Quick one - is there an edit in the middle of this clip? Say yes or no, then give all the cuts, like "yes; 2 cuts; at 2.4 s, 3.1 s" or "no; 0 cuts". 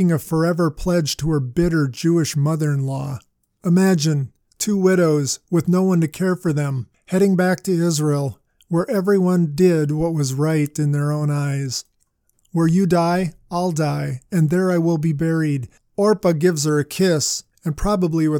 yes; 2 cuts; at 12.3 s, 15.8 s